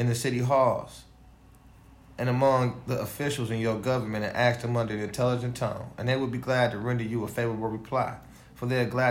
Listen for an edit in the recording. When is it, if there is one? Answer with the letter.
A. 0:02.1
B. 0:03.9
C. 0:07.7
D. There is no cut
D